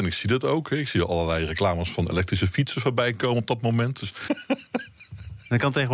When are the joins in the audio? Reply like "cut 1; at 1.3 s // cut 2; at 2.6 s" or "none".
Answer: cut 1; at 4.3 s